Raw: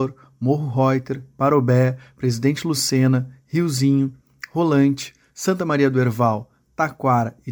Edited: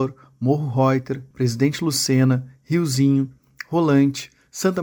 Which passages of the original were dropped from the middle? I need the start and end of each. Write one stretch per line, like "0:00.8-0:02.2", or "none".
0:01.3-0:02.1